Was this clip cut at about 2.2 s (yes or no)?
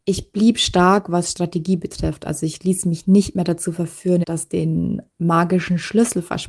no